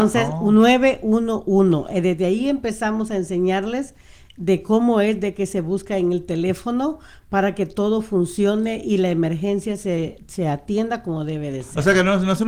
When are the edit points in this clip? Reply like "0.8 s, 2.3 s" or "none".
none